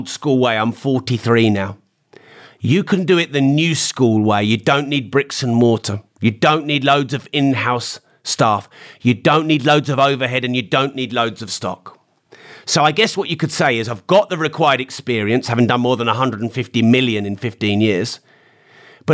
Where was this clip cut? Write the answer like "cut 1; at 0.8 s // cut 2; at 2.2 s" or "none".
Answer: none